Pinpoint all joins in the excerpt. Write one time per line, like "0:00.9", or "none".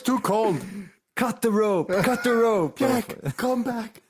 0:02.8